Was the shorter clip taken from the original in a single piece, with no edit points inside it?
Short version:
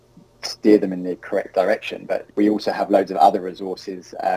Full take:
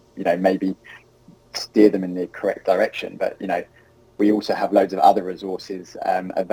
no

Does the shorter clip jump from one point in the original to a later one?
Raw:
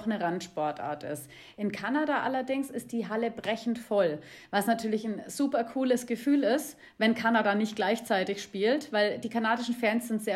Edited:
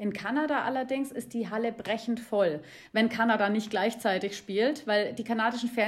yes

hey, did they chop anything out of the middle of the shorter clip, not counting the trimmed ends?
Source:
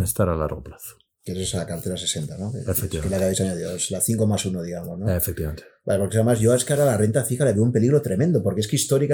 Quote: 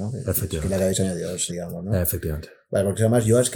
yes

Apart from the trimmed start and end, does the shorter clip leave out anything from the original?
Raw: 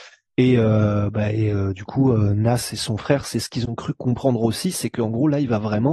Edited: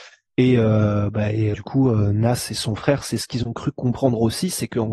yes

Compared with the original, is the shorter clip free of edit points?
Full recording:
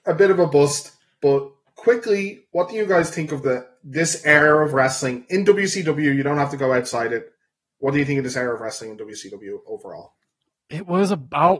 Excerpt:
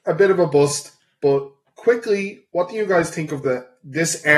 yes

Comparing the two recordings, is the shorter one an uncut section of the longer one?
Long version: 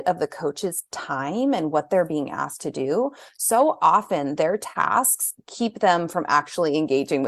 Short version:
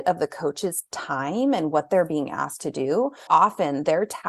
no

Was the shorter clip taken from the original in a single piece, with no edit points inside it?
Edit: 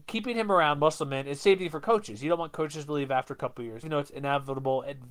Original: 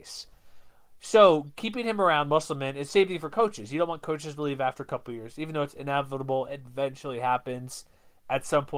no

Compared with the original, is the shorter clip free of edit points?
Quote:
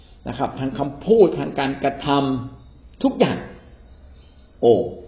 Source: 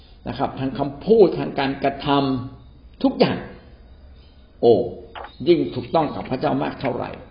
yes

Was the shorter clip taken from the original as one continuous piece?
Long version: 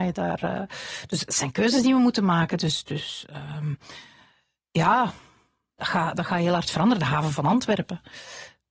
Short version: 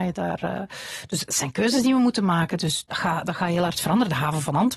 no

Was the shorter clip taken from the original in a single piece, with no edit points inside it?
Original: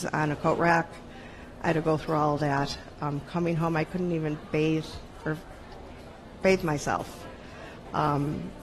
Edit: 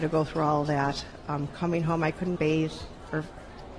no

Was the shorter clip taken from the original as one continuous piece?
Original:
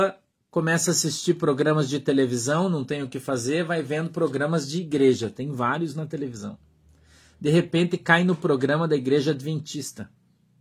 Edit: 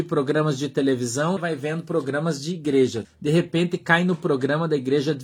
no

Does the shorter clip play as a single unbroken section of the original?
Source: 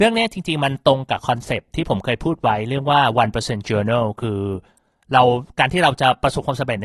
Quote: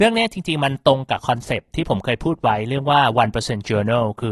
yes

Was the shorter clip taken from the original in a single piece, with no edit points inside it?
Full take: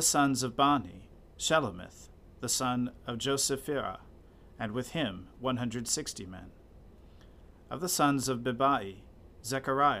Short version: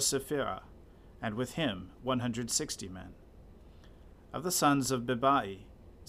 yes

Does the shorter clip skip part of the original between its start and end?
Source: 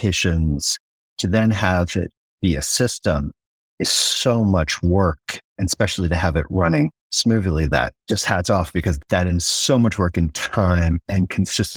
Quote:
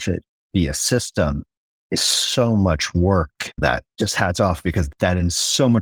yes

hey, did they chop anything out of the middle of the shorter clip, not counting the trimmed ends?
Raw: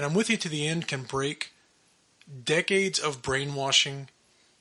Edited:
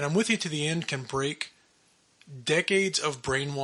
no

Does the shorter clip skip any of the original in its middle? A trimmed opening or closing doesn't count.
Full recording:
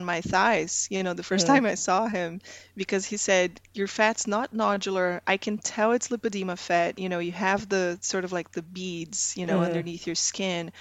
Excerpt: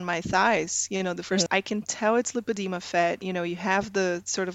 yes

